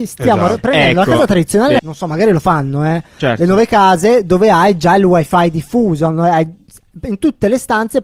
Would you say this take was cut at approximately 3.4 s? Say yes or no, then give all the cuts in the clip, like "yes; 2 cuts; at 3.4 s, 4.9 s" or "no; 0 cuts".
no; 1 cut; at 1.8 s